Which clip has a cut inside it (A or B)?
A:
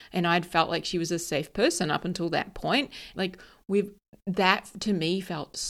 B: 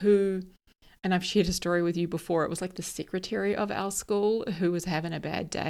A